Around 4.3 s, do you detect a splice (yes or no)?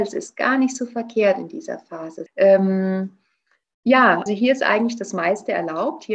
yes